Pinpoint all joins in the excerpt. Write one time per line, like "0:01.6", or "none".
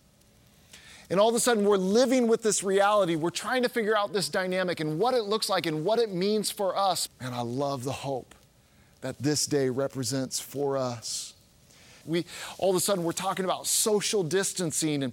0:07.1
0:12.0